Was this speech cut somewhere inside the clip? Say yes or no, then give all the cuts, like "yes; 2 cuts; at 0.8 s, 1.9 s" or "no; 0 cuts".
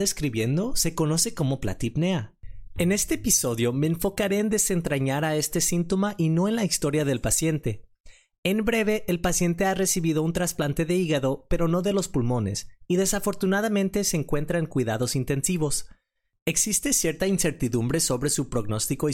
no; 0 cuts